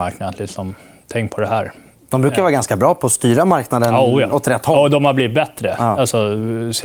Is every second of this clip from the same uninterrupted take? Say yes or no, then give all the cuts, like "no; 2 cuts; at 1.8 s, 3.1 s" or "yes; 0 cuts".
yes; 0 cuts